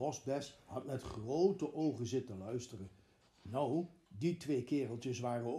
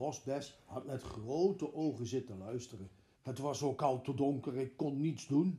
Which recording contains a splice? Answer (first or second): second